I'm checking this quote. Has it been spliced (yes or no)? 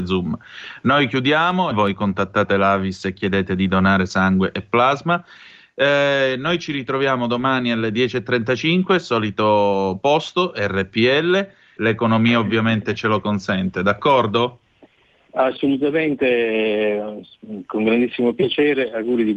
yes